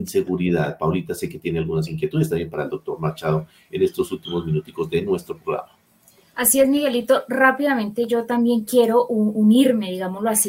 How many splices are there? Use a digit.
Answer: 0